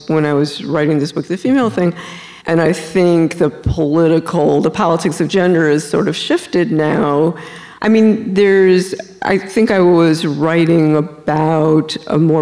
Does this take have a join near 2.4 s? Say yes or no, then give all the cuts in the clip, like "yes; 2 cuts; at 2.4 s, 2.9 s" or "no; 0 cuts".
yes; 2 cuts; at 2.4 s, 7.8 s